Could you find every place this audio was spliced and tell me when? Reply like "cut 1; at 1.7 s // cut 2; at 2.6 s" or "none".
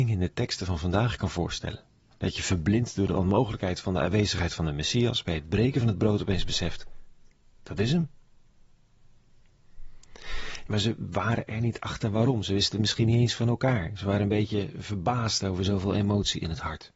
cut 1; at 7.6 s // cut 2; at 10.7 s